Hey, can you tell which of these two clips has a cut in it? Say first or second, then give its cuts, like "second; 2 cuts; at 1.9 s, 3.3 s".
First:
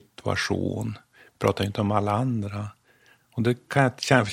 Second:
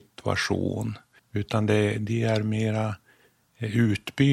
second; 1 cut; at 1.2 s